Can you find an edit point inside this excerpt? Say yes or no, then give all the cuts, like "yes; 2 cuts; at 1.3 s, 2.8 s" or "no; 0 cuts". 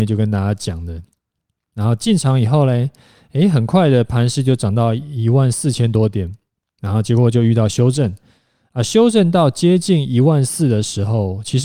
no; 0 cuts